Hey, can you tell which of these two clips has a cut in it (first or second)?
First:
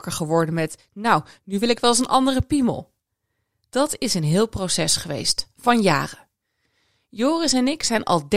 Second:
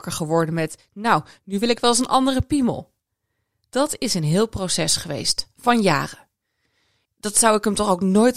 second